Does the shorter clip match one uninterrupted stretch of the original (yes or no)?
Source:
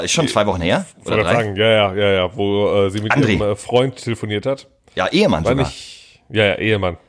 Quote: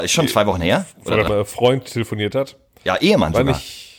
no